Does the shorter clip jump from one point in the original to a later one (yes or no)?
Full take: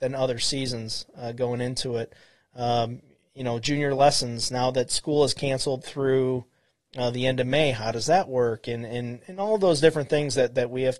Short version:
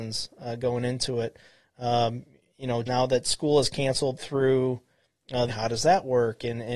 yes